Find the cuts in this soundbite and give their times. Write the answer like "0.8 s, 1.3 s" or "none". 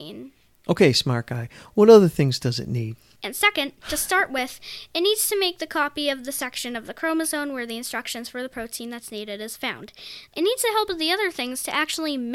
3.2 s, 10.3 s